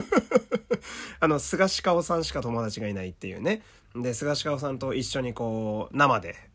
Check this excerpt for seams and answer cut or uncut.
uncut